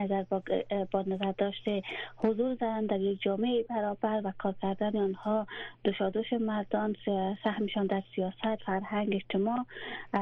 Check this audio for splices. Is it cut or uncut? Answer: uncut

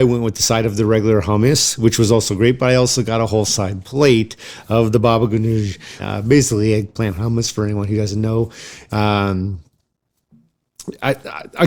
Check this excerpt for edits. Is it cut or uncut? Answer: cut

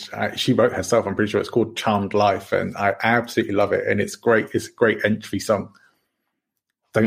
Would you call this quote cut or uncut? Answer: uncut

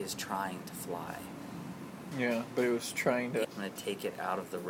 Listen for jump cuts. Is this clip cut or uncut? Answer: cut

